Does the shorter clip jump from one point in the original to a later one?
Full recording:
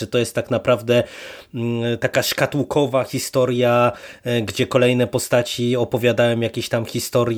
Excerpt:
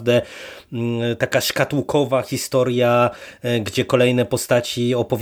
no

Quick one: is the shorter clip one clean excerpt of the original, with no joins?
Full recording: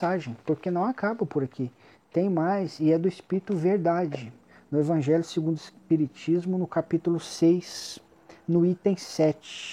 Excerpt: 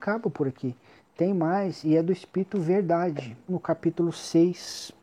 no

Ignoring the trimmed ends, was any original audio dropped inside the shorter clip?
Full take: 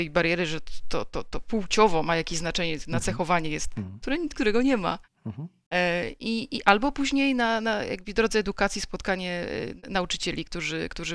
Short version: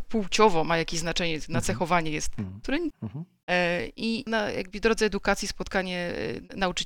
yes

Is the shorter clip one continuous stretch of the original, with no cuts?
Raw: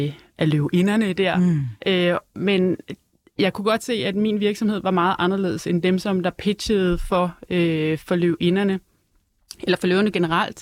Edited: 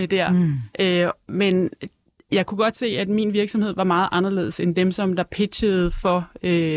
yes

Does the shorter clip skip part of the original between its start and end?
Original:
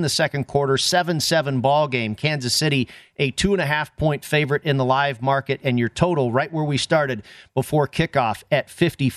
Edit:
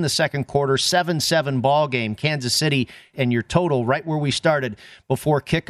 yes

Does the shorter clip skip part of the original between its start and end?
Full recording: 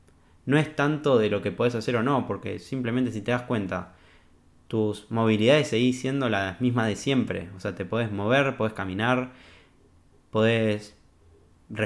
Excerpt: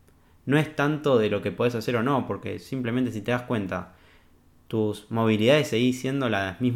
no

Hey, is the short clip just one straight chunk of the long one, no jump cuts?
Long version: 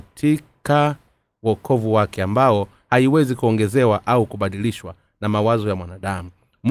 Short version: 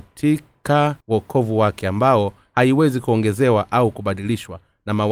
no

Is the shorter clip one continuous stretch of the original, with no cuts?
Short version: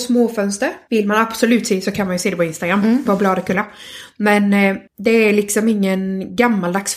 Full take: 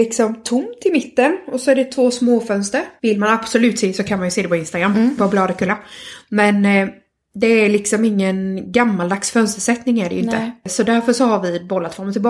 no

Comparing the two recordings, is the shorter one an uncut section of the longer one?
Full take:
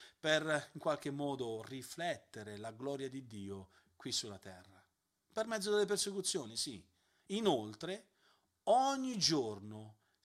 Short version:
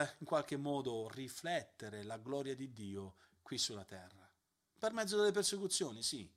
yes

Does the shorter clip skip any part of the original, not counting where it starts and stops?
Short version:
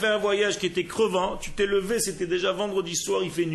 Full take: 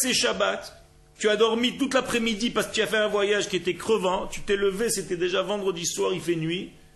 no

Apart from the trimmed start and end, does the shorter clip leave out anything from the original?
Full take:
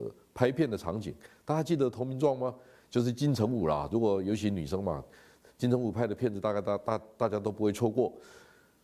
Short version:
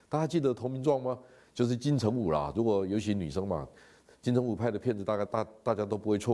yes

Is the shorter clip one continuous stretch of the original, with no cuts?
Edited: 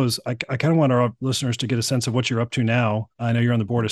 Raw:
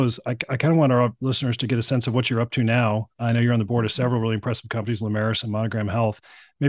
yes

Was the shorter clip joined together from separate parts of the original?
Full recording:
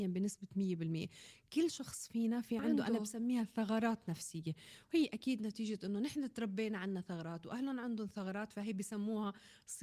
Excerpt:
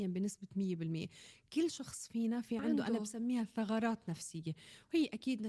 no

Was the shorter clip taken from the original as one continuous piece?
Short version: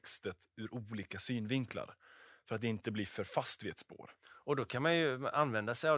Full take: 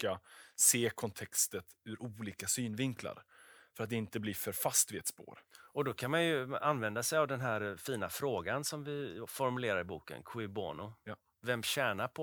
yes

